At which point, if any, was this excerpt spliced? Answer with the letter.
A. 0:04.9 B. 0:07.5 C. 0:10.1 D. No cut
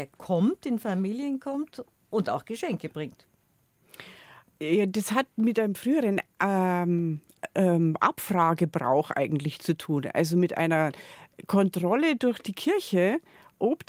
D